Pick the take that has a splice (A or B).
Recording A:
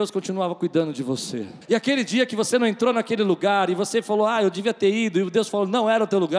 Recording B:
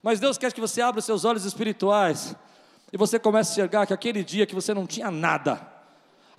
A